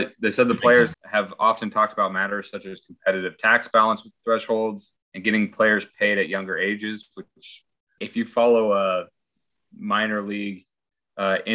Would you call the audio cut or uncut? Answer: cut